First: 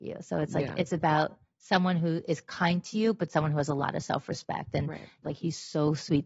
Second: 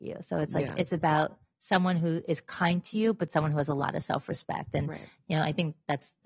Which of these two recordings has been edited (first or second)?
first